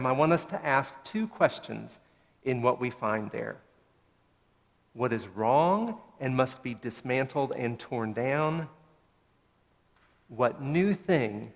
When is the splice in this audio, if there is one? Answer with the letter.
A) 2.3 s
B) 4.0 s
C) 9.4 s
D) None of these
D